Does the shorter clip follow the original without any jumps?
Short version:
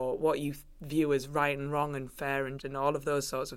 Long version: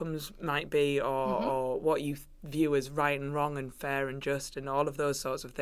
no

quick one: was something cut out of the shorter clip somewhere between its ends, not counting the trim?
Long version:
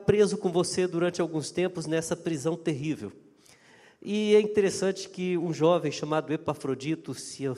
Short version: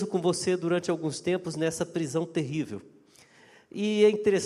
no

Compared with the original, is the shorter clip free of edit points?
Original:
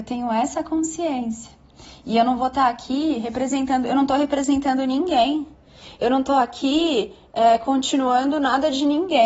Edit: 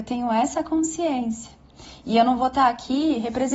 yes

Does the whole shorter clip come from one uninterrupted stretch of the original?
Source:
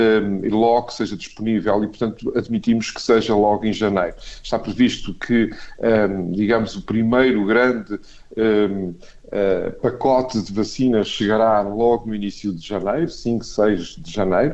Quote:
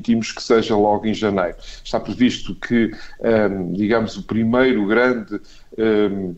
yes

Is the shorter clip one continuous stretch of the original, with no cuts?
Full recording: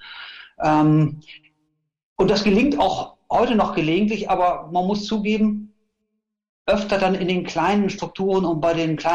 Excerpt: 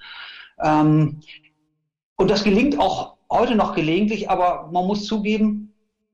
yes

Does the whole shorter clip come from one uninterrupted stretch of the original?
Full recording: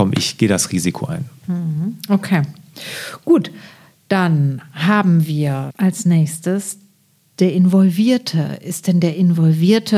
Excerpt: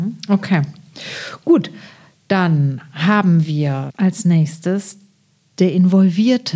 yes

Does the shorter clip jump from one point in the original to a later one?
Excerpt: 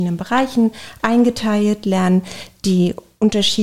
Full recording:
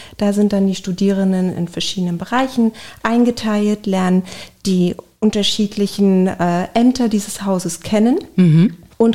no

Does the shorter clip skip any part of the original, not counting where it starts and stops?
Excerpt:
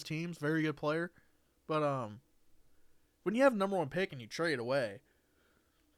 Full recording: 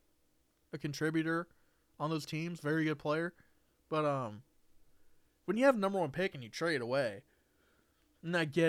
no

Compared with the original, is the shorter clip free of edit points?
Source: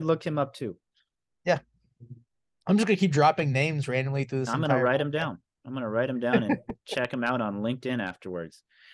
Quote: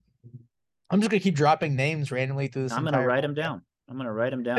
yes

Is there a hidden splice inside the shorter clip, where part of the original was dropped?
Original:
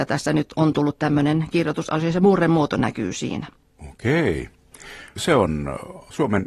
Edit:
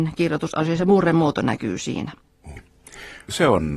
yes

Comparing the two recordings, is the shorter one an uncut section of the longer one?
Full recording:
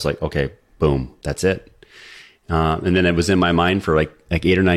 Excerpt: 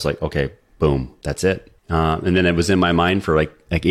no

